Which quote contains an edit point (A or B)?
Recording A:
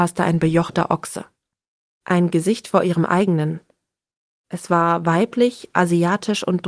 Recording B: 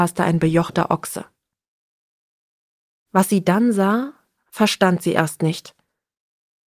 A